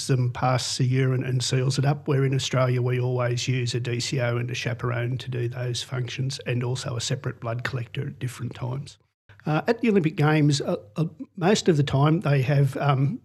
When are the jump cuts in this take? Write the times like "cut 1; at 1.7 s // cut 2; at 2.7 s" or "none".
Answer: cut 1; at 9.3 s